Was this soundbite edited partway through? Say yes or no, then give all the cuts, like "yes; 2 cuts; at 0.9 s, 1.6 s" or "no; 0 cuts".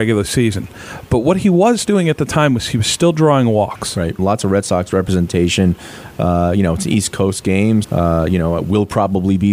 yes; 2 cuts; at 4.2 s, 7.8 s